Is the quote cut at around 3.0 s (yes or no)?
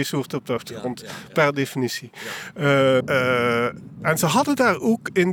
yes